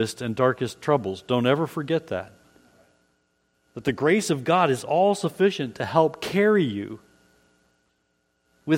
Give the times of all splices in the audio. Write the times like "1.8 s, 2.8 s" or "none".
3.5 s